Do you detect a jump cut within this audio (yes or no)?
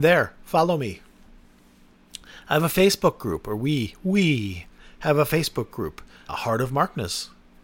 yes